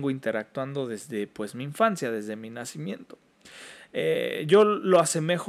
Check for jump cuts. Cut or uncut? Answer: uncut